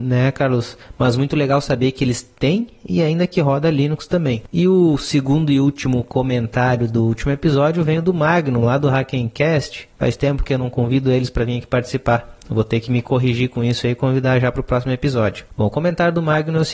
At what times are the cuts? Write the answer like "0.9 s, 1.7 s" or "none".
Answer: none